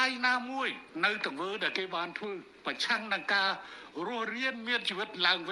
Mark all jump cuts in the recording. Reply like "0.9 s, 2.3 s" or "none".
none

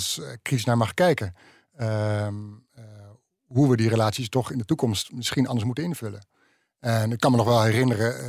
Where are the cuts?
none

